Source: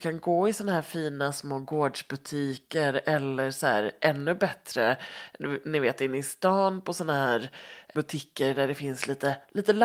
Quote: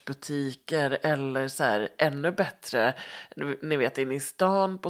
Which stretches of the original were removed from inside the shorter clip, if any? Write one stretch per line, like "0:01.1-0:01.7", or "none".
none